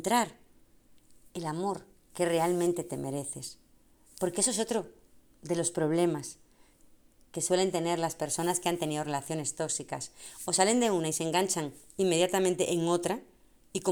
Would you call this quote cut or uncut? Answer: uncut